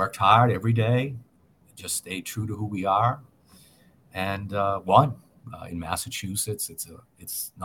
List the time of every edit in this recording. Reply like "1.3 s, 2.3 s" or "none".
5.4 s